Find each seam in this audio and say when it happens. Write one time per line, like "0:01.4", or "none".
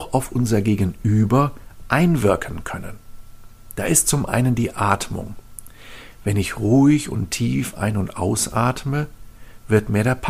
none